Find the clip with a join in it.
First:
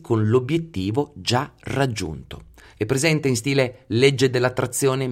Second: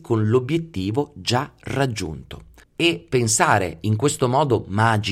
second; 1 cut; at 2.6 s

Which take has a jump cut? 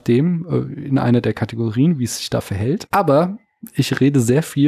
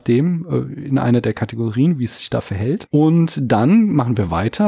first; 1 cut; at 2.9 s

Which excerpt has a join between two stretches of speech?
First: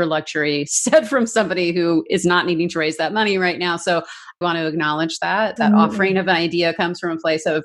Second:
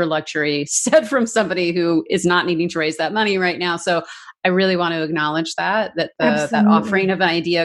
first; 2 cuts; at 4.4 s, 5.6 s

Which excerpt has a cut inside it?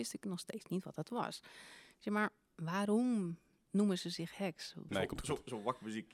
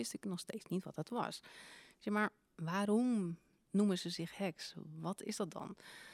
first; 1 cut; at 4.9 s

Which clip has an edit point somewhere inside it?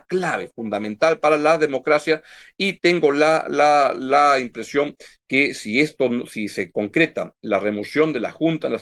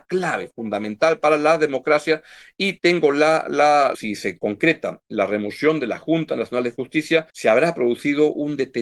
second; 2 cuts; at 3.9 s, 7.3 s

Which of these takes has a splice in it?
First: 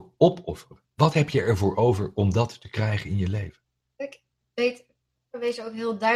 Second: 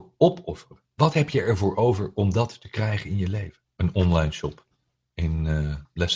second; 1 cut; at 3.7 s

